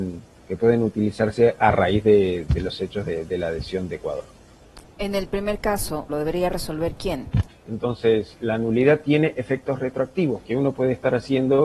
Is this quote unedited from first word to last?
no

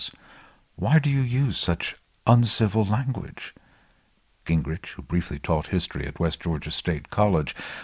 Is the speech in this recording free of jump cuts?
yes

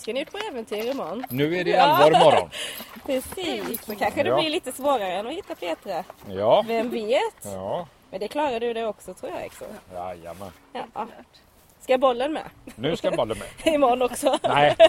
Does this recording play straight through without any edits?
yes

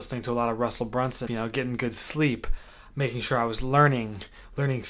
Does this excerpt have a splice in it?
yes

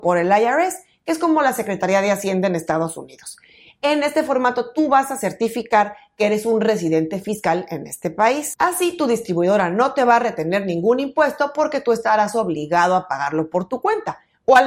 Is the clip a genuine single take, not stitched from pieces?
yes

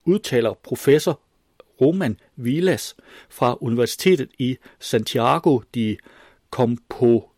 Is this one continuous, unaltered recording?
yes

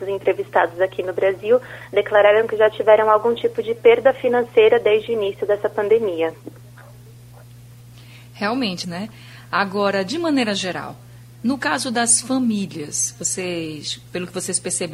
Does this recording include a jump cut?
yes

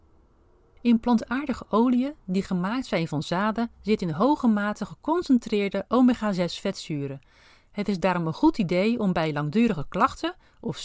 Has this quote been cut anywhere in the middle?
no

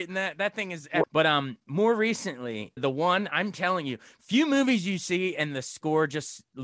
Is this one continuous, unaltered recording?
no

